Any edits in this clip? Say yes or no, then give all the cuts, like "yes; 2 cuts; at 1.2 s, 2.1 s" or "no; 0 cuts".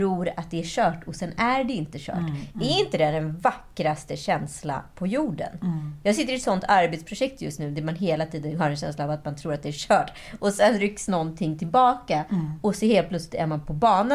no; 0 cuts